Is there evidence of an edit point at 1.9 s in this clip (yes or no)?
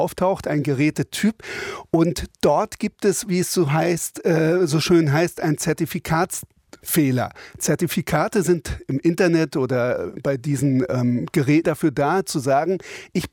no